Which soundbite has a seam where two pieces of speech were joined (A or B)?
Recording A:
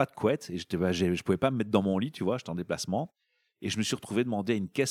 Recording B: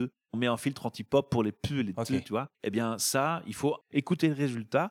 B